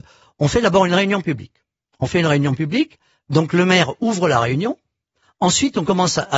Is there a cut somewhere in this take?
no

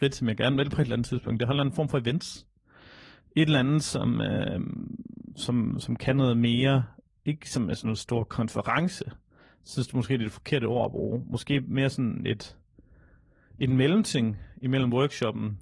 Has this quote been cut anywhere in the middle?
yes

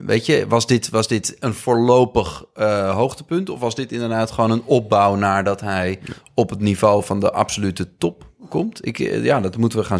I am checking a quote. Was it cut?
no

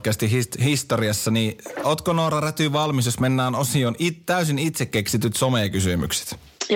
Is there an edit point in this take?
no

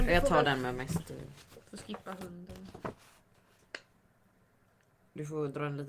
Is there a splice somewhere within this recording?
no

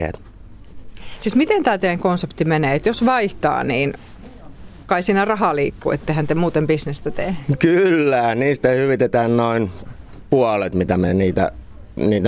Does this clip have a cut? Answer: no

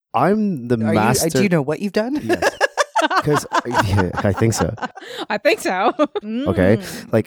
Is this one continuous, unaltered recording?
no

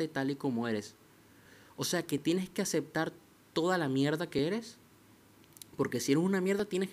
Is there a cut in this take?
no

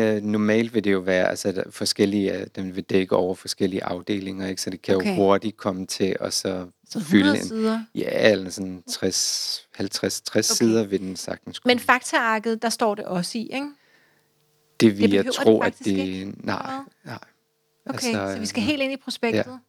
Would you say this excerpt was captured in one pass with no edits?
yes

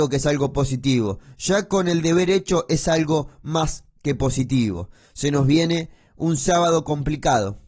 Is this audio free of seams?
yes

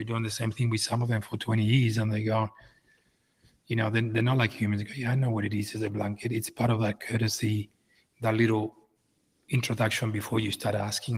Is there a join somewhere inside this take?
no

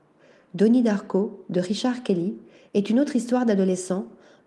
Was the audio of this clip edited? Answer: no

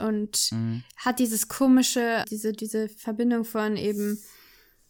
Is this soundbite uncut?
no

